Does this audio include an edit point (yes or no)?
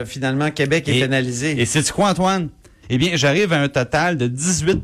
yes